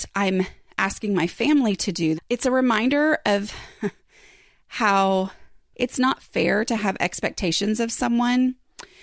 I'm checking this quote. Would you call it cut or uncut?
cut